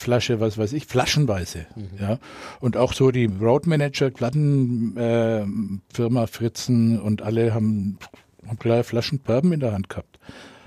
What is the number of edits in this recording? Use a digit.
0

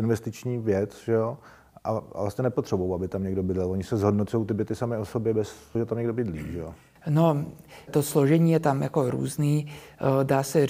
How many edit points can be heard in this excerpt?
2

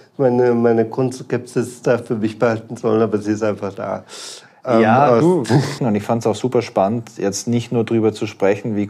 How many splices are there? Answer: 1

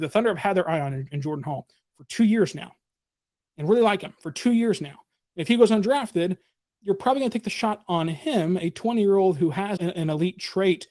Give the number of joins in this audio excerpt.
1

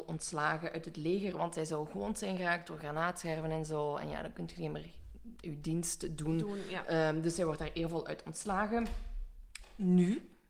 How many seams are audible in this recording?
0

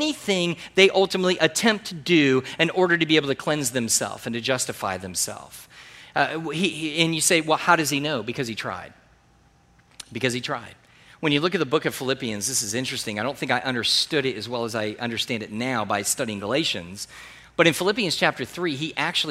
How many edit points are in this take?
0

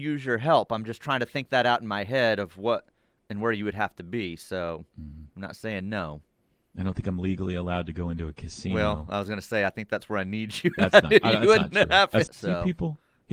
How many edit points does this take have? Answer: 1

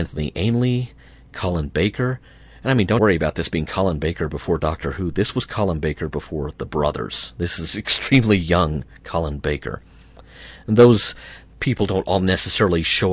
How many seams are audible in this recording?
1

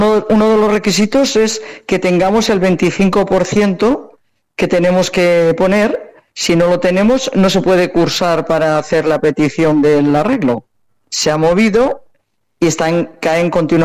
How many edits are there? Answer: 1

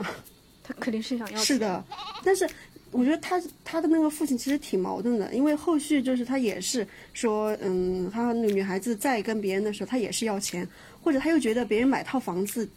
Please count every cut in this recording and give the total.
1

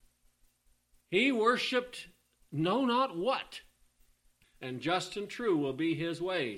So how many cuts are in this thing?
2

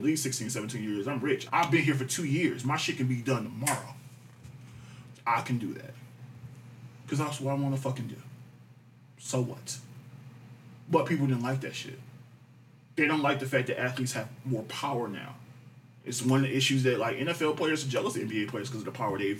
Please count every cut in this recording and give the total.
2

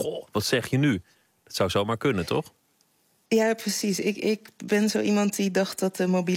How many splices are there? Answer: 0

